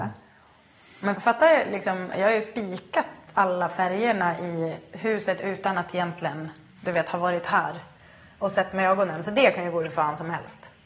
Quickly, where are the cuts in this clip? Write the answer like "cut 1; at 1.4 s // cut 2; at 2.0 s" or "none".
cut 1; at 1.1 s